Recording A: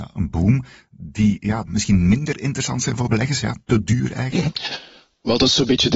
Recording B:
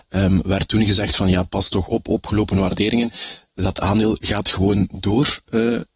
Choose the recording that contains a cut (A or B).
A